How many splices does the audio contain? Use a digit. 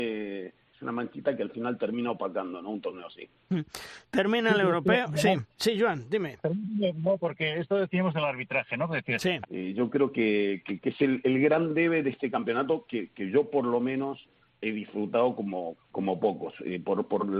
2